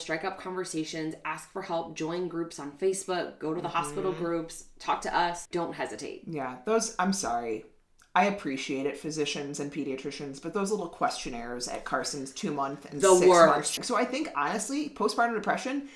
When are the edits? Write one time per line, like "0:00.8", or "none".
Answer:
0:05.5
0:13.8